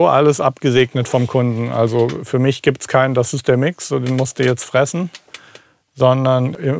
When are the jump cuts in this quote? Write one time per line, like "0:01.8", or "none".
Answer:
none